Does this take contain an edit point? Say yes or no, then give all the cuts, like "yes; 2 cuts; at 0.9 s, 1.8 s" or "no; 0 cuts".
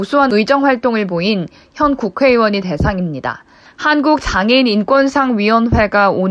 yes; 1 cut; at 3.6 s